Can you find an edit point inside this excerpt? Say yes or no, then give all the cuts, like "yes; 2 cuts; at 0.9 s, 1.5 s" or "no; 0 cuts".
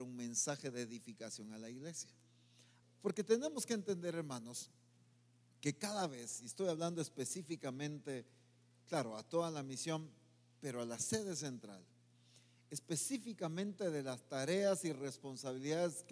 yes; 1 cut; at 2.8 s